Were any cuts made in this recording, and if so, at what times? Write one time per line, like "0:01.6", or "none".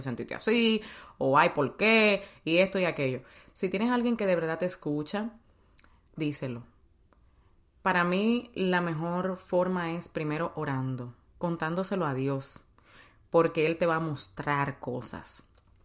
0:06.2